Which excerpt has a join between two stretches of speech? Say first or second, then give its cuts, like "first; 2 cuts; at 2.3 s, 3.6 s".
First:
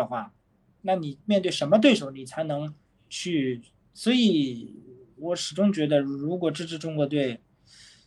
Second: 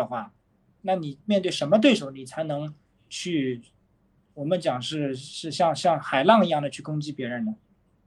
first; 1 cut; at 3.8 s